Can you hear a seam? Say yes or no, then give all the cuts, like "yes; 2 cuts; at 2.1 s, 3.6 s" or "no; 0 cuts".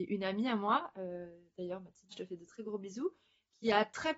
yes; 1 cut; at 2.1 s